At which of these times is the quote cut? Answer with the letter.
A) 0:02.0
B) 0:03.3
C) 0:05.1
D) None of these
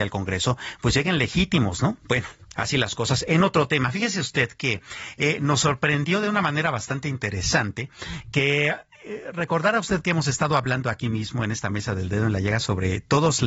A